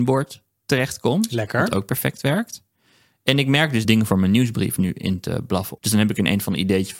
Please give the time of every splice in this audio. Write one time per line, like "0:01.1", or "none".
0:03.8
0:05.8